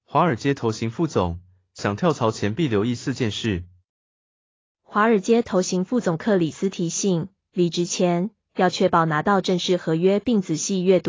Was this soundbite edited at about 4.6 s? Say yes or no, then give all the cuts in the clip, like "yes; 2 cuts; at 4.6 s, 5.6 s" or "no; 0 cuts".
no; 0 cuts